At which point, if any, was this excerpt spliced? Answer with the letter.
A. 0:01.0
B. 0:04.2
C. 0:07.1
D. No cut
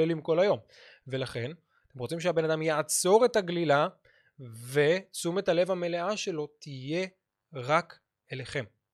D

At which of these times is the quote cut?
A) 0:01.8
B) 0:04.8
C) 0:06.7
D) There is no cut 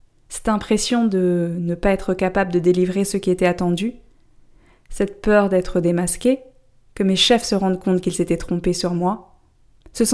D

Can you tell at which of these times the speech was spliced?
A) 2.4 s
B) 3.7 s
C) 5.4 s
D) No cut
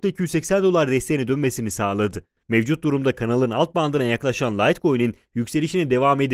A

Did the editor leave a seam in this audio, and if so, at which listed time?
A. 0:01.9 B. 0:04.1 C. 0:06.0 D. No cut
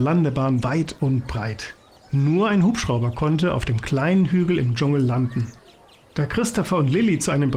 D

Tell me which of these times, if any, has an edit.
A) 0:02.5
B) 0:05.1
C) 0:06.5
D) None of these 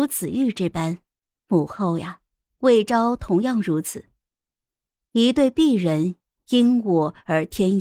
A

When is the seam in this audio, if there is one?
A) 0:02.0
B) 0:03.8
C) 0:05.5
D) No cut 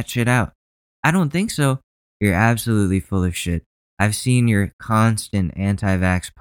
A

